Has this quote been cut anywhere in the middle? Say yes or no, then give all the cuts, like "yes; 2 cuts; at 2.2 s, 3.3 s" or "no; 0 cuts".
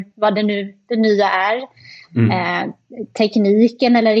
no; 0 cuts